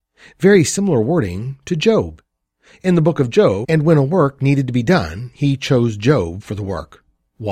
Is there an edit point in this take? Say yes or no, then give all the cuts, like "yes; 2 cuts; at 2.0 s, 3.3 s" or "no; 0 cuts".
yes; 1 cut; at 3.6 s